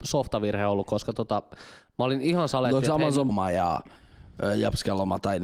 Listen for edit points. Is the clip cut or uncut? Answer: cut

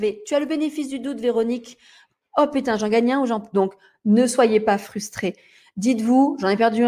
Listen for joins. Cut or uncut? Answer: cut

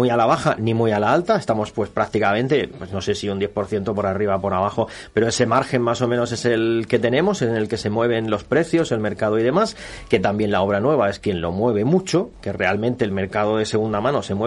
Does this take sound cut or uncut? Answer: cut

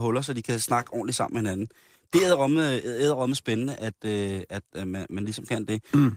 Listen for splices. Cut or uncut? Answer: uncut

